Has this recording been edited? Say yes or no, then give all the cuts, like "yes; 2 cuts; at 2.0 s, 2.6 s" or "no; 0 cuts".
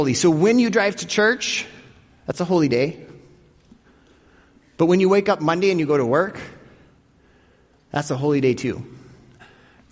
no; 0 cuts